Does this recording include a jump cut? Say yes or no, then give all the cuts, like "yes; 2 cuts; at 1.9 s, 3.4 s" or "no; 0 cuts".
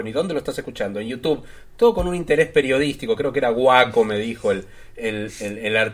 no; 0 cuts